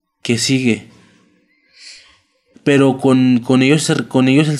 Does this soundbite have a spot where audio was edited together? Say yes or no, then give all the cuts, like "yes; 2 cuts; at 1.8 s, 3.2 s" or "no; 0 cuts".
yes; 1 cut; at 2.5 s